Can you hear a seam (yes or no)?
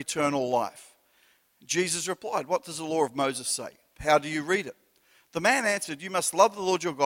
no